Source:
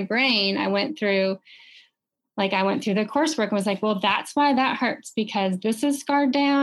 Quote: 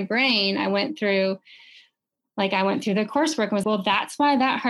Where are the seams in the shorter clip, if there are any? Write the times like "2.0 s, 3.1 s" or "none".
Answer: 3.6 s